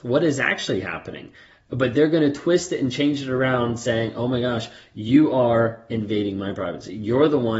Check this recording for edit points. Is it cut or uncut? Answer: uncut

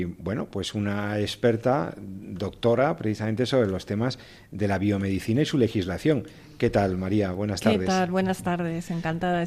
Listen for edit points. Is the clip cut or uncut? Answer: uncut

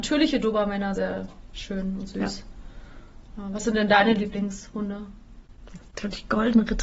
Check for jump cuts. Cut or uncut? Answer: cut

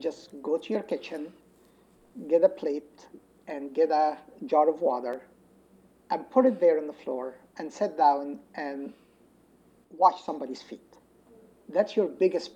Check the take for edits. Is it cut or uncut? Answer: uncut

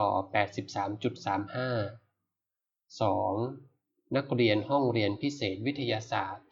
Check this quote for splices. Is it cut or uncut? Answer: uncut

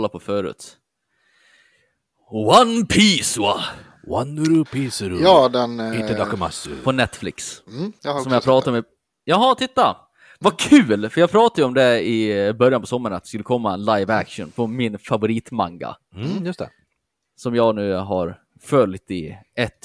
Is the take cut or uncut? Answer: uncut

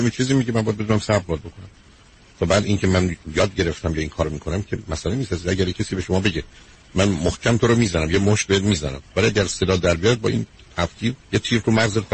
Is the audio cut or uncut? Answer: cut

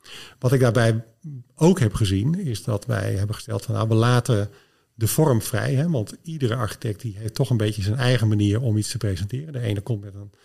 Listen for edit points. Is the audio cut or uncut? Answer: uncut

